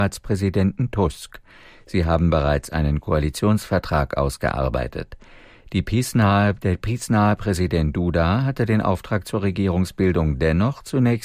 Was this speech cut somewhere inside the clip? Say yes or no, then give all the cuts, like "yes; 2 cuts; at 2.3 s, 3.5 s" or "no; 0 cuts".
no; 0 cuts